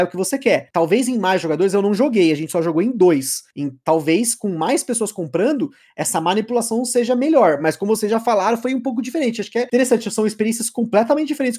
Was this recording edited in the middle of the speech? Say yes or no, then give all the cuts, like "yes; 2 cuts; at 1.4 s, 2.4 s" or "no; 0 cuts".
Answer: no; 0 cuts